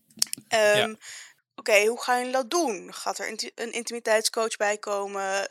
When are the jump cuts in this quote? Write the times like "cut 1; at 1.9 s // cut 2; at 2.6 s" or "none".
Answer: cut 1; at 1.4 s